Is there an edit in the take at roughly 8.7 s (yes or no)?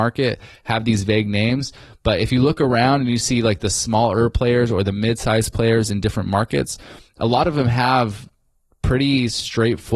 no